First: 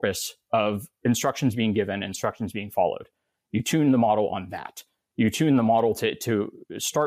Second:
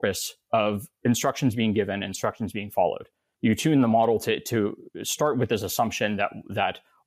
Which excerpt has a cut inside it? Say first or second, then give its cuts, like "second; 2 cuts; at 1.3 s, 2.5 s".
second; 1 cut; at 3.3 s